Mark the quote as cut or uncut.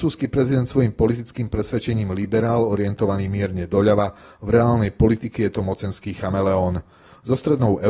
uncut